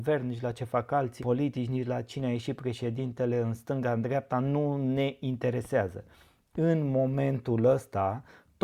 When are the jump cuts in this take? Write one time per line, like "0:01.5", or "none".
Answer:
0:01.2